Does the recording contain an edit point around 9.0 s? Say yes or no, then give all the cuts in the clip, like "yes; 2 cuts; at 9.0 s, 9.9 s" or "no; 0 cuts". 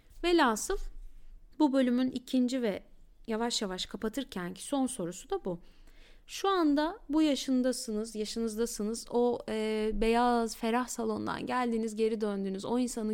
no; 1 cut; at 1.5 s